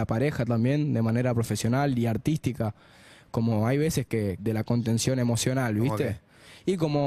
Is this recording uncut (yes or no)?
no